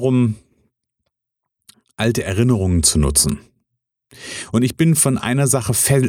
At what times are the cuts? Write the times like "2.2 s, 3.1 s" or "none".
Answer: none